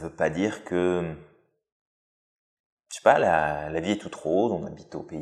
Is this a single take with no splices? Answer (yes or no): yes